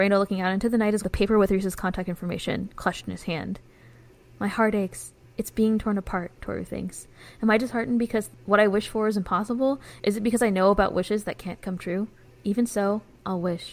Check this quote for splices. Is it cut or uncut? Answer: cut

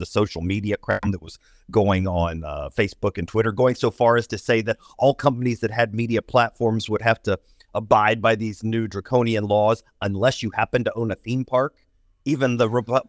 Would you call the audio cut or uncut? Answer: uncut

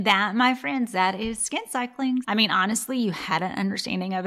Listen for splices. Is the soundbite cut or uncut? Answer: cut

